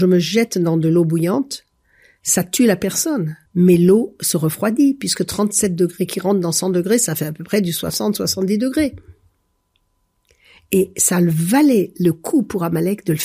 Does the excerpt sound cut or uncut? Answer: cut